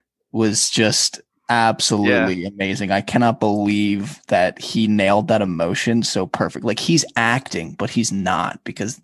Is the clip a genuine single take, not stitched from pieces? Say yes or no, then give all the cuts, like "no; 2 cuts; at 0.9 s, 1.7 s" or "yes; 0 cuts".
yes; 0 cuts